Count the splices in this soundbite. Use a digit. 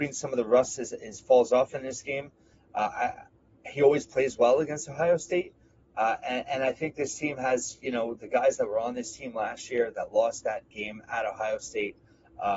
0